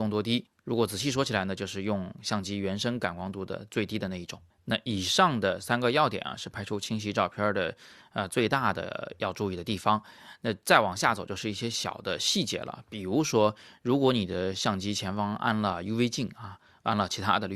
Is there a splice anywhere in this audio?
no; 0 cuts

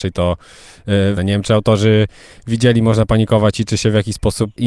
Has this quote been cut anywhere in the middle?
yes; 1 cut; at 1.2 s

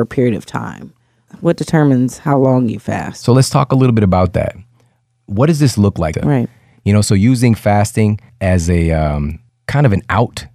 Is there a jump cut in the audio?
yes; 1 cut; at 6.1 s

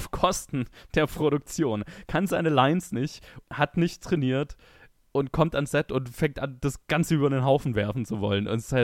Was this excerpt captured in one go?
no; 1 cut; at 3.4 s

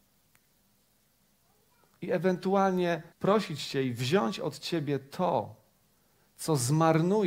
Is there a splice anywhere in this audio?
yes; 2 cuts; at 1.9 s, 3.1 s

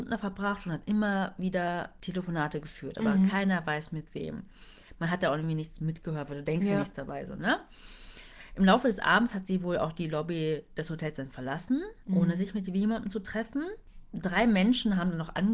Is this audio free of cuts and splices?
yes; 0 cuts

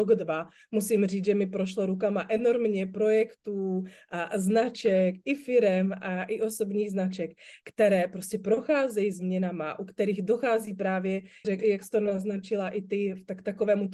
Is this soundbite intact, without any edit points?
no; 1 cut; at 11.4 s

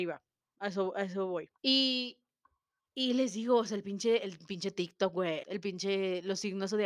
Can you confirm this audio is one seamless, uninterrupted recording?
no; 2 cuts; at 1.6 s, 5.4 s

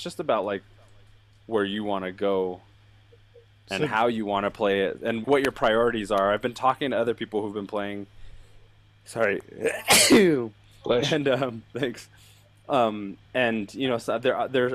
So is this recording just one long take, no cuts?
no; 1 cut; at 5.2 s

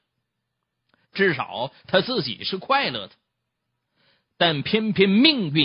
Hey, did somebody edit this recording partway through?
yes; 1 cut; at 1.0 s

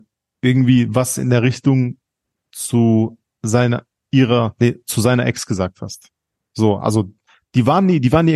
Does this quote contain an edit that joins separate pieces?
no; 0 cuts

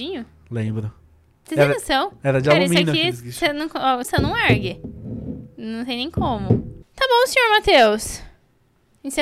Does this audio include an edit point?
yes; 2 cuts; at 4.0 s, 6.8 s

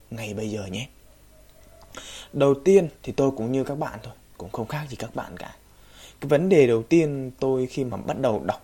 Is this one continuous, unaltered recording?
no; 1 cut; at 3.0 s

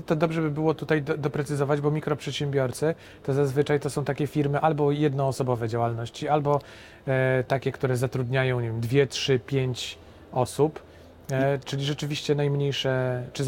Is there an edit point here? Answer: no; 0 cuts

